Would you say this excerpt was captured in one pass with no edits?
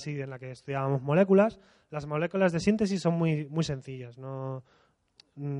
yes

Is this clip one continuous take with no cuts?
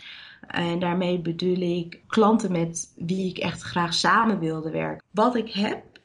no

